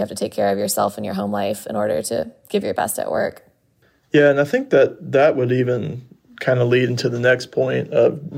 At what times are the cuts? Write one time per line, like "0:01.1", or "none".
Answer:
none